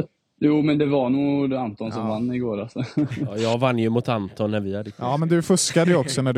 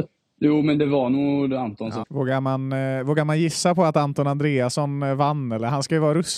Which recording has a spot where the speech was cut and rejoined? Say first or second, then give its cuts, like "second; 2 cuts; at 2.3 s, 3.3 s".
second; 1 cut; at 2.0 s